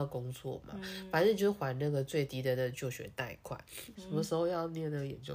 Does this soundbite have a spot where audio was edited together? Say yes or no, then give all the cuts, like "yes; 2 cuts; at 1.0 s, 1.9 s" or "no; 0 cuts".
yes; 1 cut; at 3.9 s